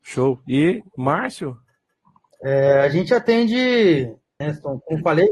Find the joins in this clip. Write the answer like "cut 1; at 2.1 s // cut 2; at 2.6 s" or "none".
cut 1; at 4.4 s